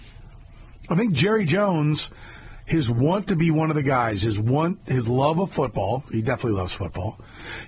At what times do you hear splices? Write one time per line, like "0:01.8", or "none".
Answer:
none